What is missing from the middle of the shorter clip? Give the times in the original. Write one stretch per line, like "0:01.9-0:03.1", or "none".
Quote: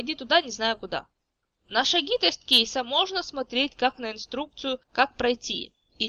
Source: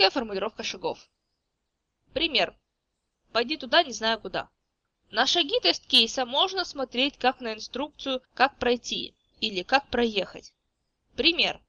none